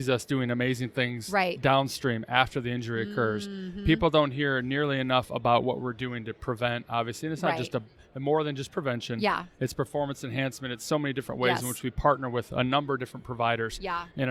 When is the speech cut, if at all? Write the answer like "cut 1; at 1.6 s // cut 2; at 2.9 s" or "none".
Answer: none